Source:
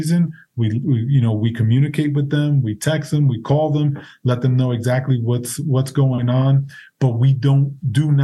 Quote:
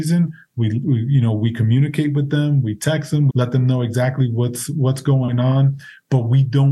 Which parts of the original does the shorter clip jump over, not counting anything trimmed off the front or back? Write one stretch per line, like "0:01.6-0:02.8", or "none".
0:03.3-0:04.2